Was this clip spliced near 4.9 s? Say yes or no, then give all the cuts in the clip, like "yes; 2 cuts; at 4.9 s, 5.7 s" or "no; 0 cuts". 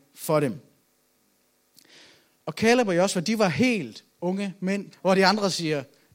yes; 1 cut; at 4.9 s